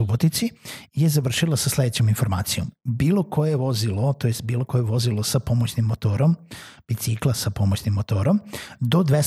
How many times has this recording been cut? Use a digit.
0